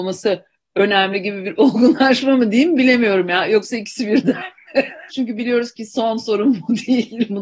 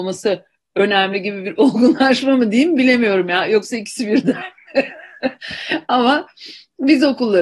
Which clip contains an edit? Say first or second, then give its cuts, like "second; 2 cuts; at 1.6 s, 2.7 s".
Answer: first; 1 cut; at 5.1 s